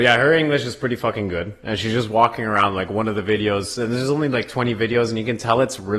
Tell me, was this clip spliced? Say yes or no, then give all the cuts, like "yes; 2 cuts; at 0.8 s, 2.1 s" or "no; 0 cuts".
no; 0 cuts